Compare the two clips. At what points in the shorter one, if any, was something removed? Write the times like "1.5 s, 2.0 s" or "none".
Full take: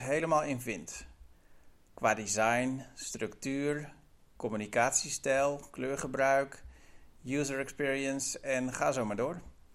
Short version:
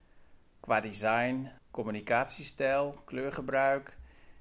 1.6 s